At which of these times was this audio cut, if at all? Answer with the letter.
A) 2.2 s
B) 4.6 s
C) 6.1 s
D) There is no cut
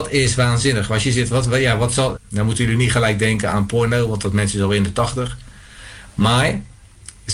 A